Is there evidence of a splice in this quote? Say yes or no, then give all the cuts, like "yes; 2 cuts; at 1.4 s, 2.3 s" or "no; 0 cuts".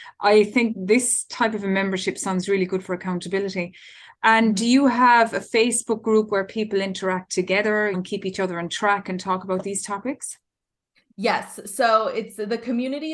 yes; 1 cut; at 7.9 s